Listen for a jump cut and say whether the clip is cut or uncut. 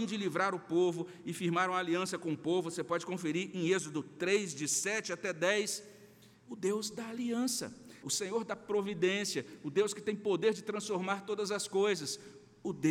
cut